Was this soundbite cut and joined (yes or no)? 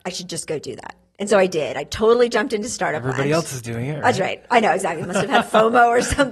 no